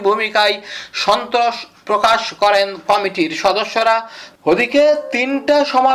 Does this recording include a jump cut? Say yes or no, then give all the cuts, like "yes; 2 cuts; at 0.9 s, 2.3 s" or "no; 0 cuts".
no; 0 cuts